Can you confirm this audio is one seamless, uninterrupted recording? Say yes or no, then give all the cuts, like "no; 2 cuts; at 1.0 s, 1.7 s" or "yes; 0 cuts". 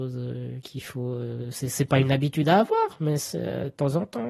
yes; 0 cuts